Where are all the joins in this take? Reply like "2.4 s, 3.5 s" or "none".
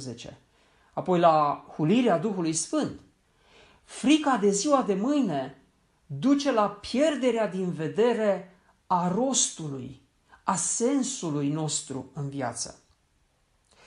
none